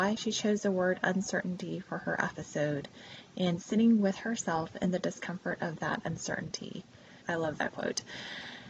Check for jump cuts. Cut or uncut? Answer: cut